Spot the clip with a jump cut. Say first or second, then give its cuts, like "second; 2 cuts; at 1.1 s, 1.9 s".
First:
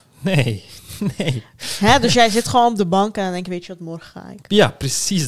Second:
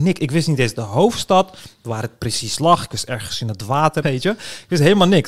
second; 1 cut; at 4.0 s